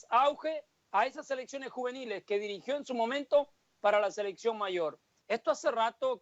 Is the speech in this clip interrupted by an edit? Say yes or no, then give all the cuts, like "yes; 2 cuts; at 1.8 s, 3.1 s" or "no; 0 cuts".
yes; 1 cut; at 5.2 s